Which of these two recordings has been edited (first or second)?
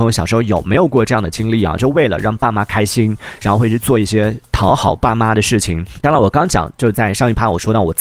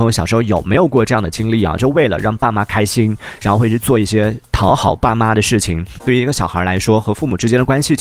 second